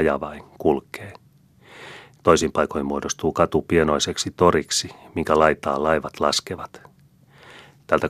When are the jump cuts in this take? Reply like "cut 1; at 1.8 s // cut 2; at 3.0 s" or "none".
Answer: cut 1; at 2.1 s